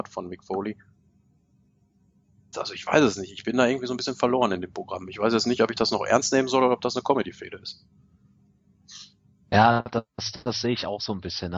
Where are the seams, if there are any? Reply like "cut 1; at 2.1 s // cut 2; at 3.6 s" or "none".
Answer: cut 1; at 2.5 s